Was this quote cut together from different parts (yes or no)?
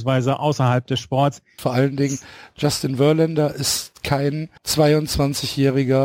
yes